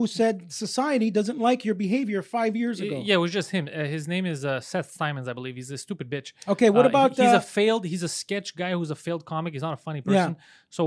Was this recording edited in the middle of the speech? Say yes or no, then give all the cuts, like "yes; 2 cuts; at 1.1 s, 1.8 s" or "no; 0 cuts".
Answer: no; 0 cuts